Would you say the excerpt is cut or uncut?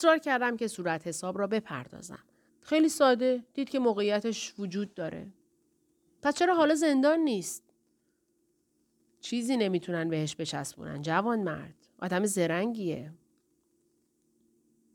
cut